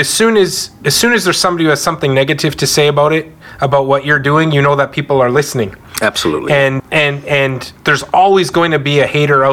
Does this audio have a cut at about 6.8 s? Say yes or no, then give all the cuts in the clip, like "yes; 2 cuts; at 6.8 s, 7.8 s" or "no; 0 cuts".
yes; 1 cut; at 6.8 s